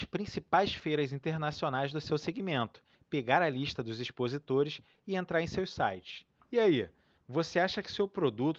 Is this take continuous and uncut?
no; 2 cuts; at 2.9 s, 6.4 s

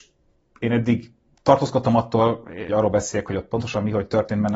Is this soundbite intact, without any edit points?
no; 1 cut; at 2.7 s

